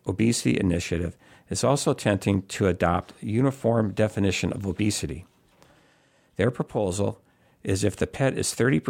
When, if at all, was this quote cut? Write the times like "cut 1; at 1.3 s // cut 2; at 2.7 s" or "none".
none